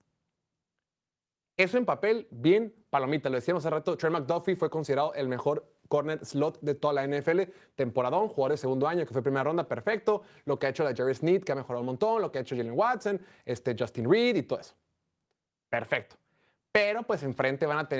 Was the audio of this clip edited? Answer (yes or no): no